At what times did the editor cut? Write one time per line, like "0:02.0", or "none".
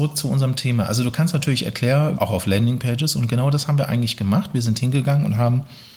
0:02.2

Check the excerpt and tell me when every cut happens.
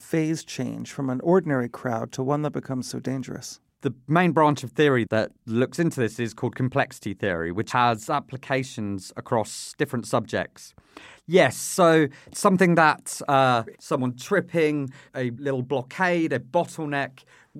0:11.1
0:13.7

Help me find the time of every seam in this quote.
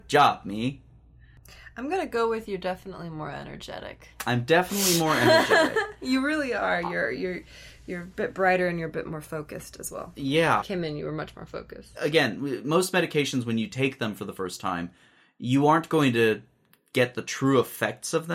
0:10.6
0:11.9

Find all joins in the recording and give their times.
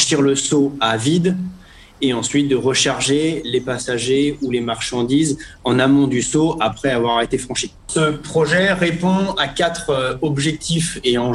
0:07.8

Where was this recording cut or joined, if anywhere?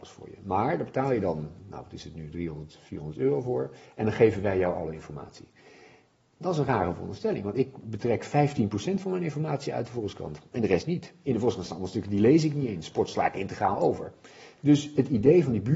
0:01.6

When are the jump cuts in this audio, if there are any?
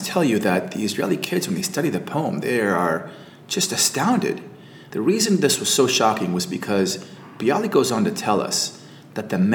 0:04.9

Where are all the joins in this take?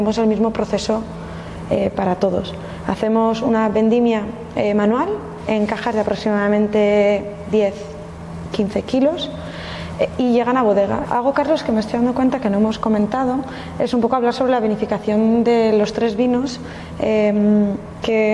0:11.0

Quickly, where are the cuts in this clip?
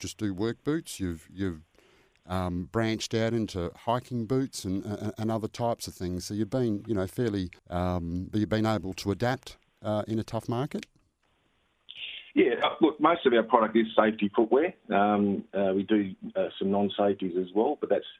0:07.6

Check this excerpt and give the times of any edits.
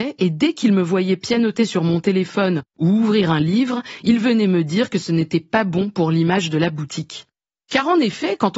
none

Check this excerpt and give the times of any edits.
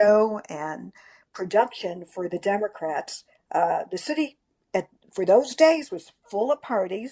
none

